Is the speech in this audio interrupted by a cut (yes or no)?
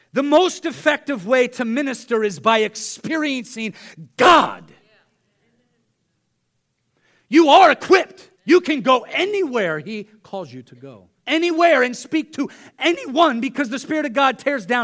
yes